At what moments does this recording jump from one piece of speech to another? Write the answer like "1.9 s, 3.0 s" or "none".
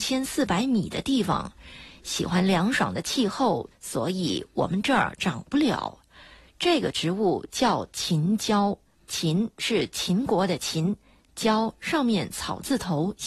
3.7 s